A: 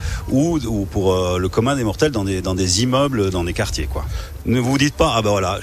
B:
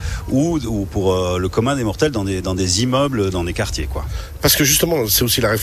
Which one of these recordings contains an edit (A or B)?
A